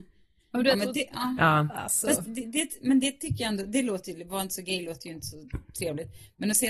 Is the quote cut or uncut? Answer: uncut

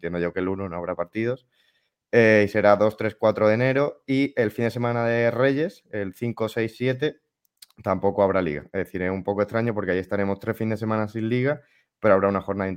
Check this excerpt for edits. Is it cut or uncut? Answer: uncut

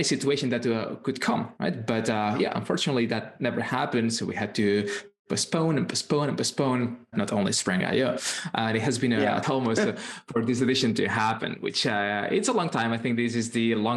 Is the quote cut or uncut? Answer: cut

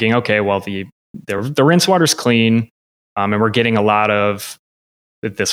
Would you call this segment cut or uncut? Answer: uncut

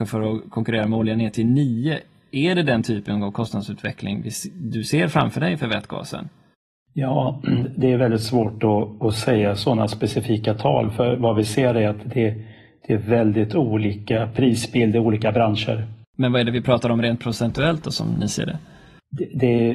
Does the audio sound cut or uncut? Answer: cut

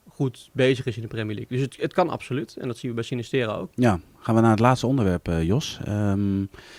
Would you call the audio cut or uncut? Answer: cut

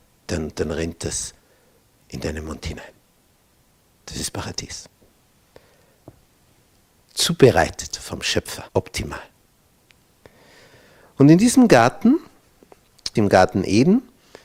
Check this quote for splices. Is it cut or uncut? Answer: cut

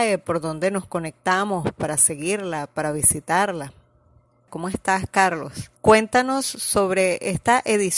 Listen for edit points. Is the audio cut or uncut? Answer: cut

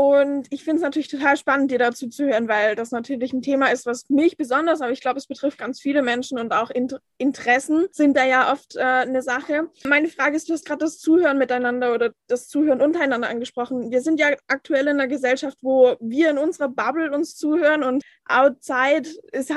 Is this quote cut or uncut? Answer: uncut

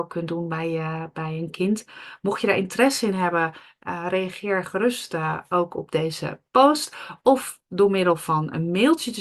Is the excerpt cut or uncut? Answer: uncut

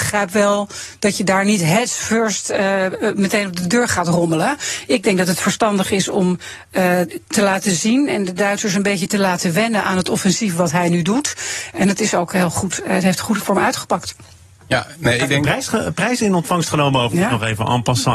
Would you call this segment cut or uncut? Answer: cut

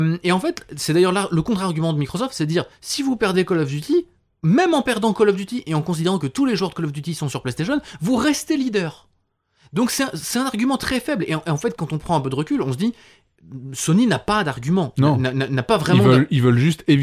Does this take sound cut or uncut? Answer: uncut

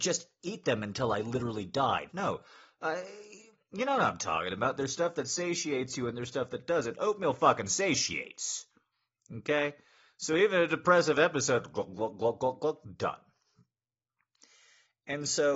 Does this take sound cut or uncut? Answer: cut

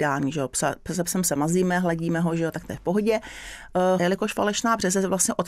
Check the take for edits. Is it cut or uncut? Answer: cut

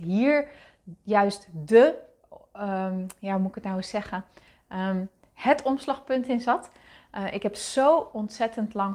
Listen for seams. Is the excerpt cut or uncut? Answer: uncut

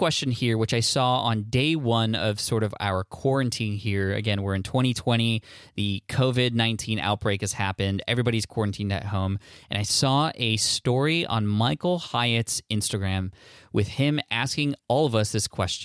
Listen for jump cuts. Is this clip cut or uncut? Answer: uncut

